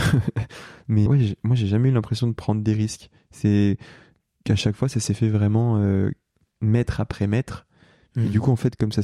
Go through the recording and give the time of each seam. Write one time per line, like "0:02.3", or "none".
0:01.1